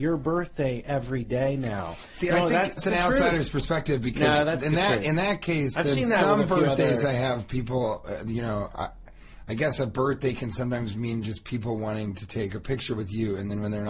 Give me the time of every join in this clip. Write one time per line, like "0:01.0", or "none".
0:02.8